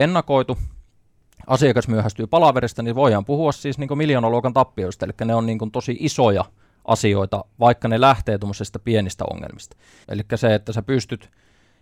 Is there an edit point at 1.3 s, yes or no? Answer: no